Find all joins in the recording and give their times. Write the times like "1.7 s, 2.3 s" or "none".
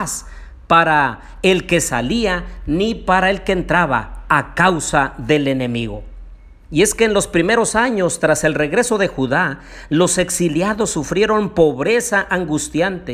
none